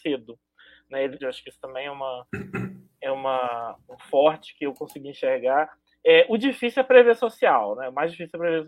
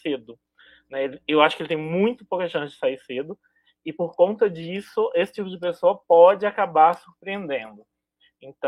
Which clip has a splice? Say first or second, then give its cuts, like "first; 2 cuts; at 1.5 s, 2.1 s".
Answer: first; 1 cut; at 1.2 s